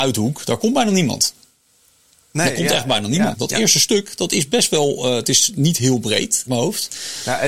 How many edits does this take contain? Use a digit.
2